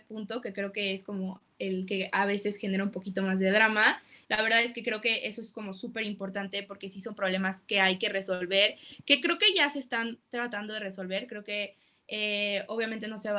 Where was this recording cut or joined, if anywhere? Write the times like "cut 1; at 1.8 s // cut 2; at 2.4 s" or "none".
cut 1; at 4.2 s